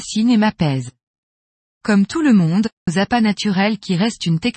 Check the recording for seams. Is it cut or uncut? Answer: cut